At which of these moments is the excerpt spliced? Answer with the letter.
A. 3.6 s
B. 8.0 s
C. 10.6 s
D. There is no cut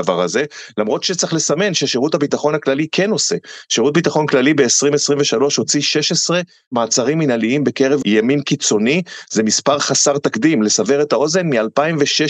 B